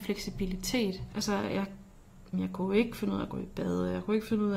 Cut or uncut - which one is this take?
cut